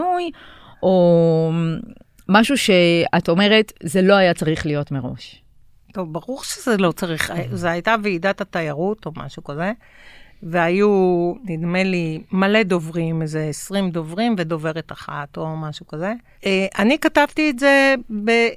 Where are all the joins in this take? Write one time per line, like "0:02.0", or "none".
0:16.3